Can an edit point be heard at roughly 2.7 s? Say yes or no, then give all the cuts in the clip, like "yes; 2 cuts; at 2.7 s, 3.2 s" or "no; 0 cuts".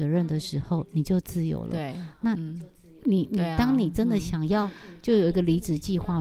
no; 0 cuts